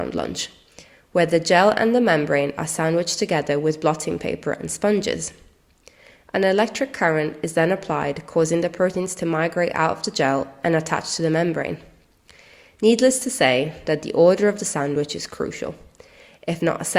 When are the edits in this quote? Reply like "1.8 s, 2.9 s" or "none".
none